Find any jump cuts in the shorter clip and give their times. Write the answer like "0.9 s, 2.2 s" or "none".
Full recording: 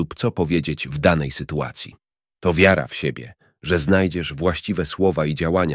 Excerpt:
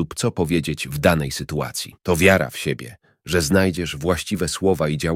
2.0 s